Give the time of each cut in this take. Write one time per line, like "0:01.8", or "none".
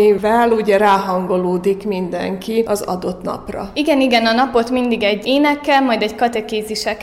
none